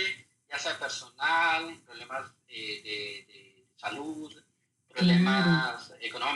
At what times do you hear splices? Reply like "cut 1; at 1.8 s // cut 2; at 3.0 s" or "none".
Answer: cut 1; at 1.8 s // cut 2; at 3.7 s